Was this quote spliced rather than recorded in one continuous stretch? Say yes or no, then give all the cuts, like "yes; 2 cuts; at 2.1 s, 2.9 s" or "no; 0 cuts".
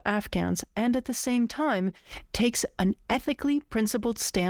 no; 0 cuts